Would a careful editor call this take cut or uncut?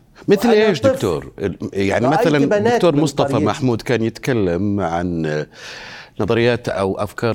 uncut